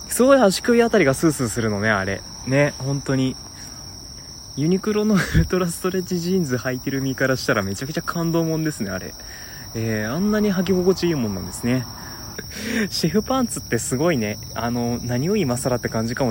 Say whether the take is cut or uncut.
cut